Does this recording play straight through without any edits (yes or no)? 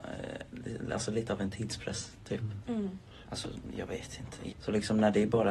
no